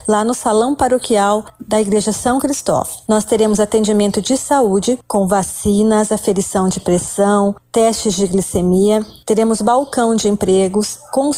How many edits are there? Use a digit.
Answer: 1